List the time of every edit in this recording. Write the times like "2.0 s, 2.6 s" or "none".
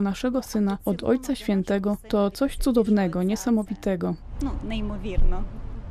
4.6 s